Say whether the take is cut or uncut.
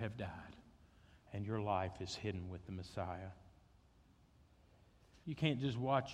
cut